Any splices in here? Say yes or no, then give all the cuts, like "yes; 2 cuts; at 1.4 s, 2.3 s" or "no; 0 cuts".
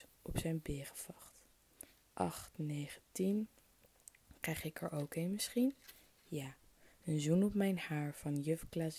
no; 0 cuts